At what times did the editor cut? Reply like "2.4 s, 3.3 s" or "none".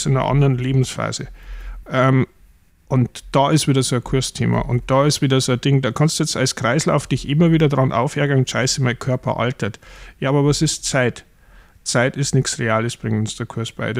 1.8 s

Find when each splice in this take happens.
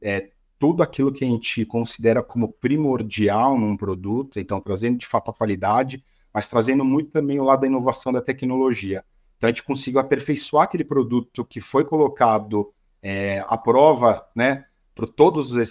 none

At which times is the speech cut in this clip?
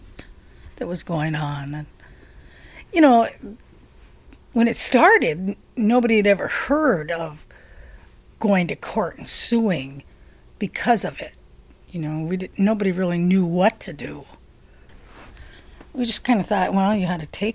none

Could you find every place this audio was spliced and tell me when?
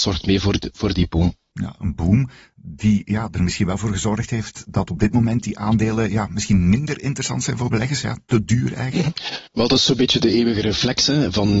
9.5 s

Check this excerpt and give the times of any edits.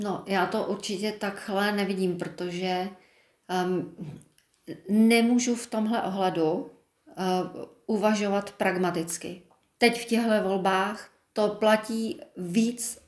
9.8 s

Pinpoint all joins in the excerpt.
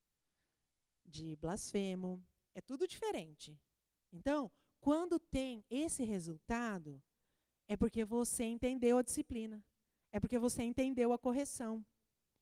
none

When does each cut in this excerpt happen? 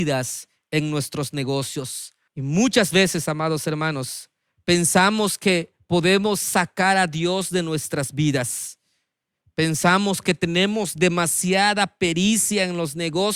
2.3 s

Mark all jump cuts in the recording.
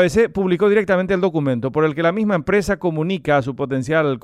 none

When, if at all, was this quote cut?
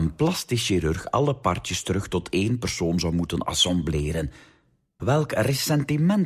5.0 s

